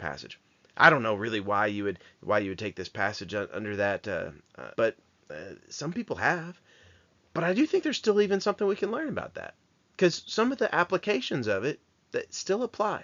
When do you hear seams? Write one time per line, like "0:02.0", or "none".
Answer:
0:04.7